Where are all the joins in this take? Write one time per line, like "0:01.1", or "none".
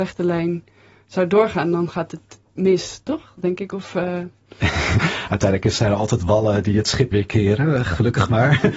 0:07.1